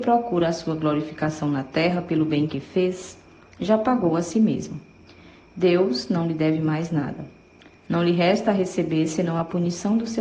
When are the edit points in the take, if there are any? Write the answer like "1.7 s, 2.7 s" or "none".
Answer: none